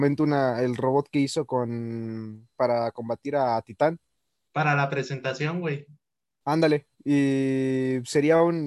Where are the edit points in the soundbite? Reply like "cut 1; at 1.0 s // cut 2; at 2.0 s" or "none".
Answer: cut 1; at 6.9 s